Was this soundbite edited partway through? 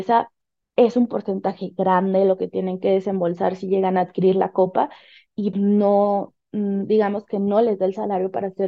yes; 1 cut; at 5.5 s

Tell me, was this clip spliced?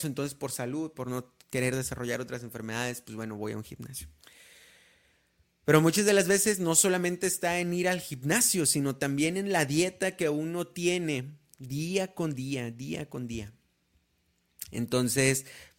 no; 0 cuts

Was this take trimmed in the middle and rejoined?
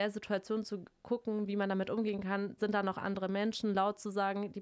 yes; 1 cut; at 2.6 s

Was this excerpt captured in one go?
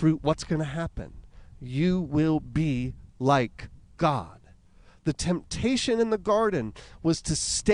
yes; 0 cuts

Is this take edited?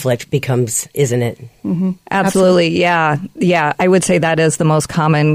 no; 0 cuts

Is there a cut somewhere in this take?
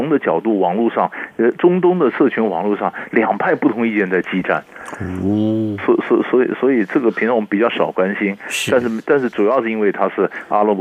no; 0 cuts

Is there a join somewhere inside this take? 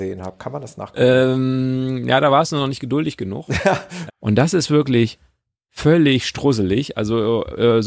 yes; 1 cut; at 4.1 s

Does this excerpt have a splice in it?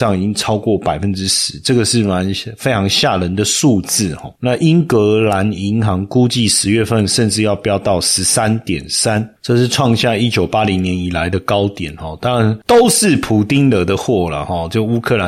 no; 0 cuts

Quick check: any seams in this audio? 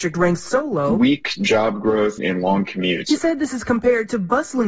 yes; 1 cut; at 2.2 s

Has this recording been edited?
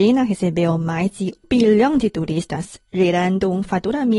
yes; 1 cut; at 1.4 s

